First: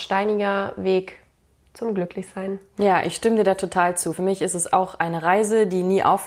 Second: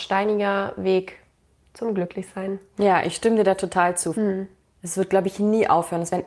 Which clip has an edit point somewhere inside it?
second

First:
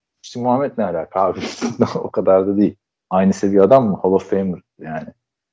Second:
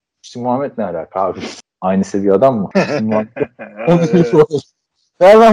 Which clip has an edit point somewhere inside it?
second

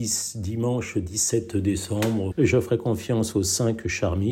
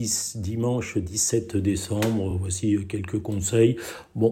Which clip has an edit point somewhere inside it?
first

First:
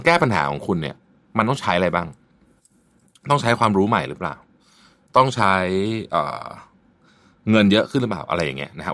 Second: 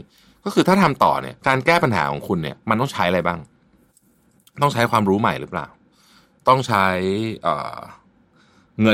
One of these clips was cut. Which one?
second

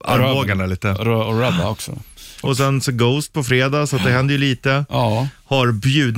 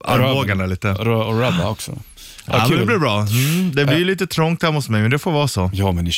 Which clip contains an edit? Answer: first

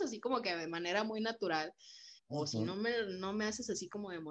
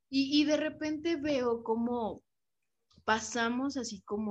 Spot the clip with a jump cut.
first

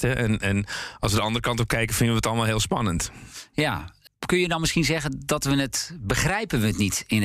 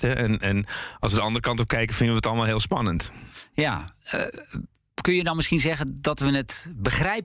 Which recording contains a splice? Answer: first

